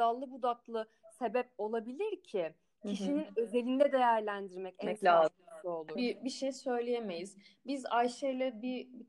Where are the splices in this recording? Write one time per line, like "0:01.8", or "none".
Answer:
0:06.0

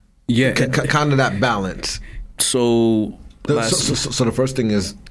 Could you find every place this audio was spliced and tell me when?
0:02.4
0:03.5

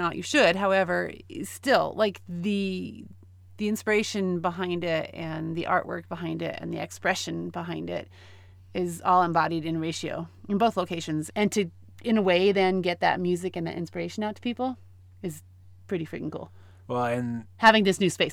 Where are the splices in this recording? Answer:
0:11.3

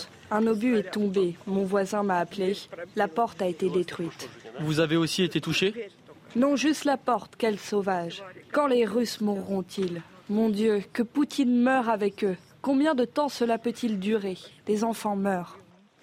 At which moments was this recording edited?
none

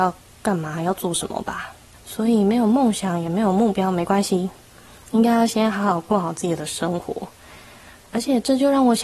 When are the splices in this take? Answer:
0:01.9

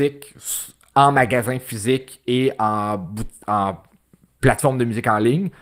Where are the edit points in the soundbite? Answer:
none

